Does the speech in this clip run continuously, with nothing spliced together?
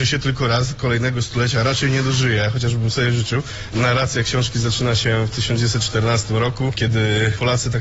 no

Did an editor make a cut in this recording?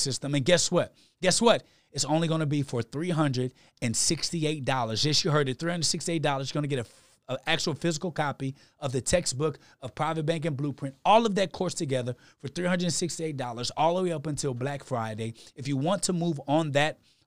no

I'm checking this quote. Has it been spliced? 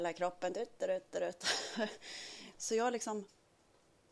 yes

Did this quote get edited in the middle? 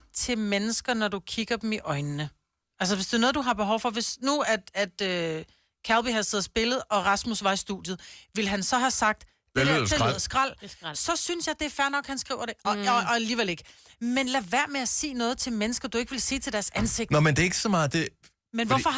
no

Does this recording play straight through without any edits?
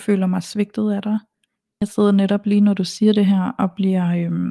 no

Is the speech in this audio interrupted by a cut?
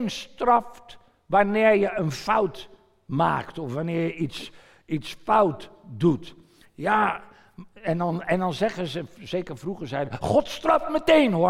no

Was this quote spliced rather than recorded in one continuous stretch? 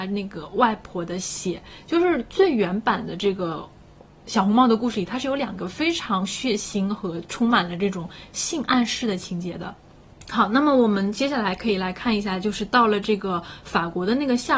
no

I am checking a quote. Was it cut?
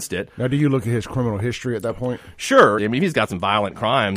yes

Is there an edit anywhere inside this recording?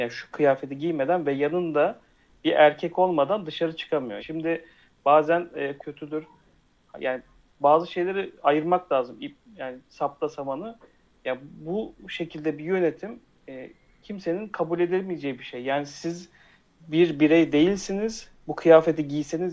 yes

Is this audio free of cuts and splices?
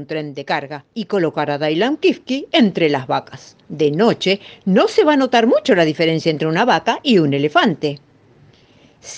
yes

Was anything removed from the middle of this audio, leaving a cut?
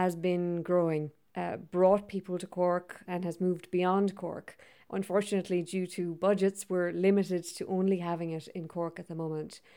yes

